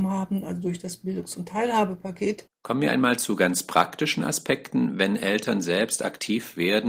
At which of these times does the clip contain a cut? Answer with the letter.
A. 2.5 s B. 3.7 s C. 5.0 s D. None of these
A